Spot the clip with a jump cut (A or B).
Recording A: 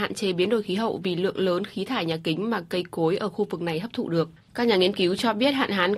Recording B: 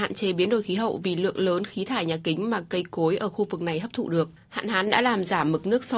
A